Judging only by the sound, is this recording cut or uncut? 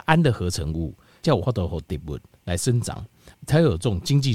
cut